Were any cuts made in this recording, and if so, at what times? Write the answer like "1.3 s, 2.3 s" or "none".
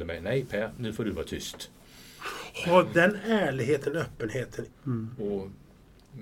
4.7 s

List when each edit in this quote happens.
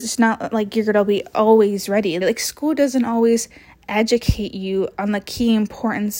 2.2 s

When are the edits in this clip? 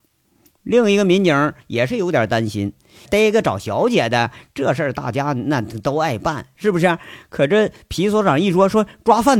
3.1 s

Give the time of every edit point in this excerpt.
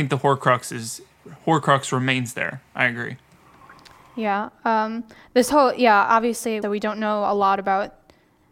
6.6 s

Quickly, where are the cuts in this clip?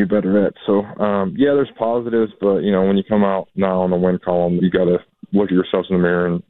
3.5 s, 4.6 s

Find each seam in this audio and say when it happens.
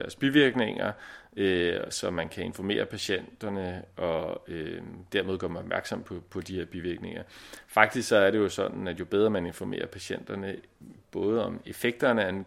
none

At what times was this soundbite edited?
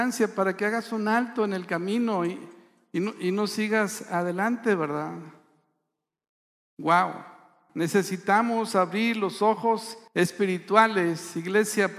7.7 s, 10.1 s

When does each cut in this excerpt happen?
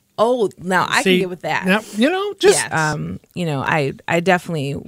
2.7 s

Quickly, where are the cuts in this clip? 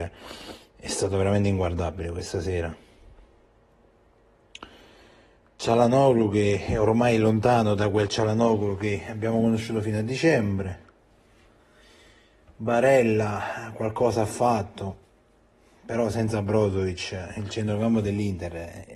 5.4 s

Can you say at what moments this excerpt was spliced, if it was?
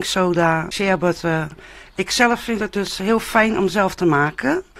none

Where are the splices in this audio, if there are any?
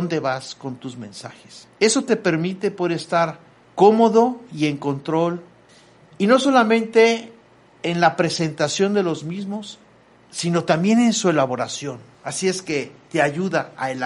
none

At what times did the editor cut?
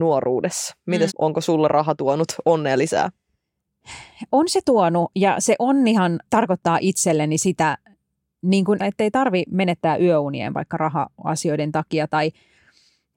1.1 s, 6.3 s, 8.8 s

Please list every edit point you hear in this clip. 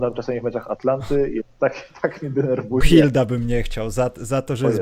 2.8 s

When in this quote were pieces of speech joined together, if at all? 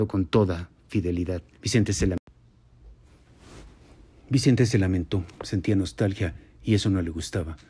1.5 s

